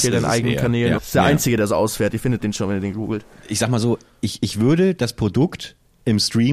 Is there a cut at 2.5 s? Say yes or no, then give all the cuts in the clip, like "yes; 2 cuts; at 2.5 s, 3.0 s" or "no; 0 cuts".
no; 1 cut; at 1.0 s